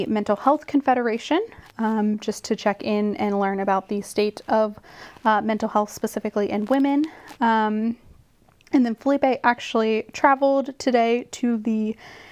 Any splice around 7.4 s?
no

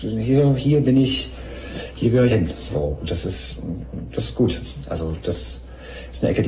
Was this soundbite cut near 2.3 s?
yes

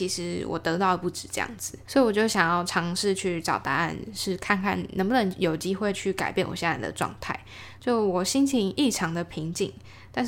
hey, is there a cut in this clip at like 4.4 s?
no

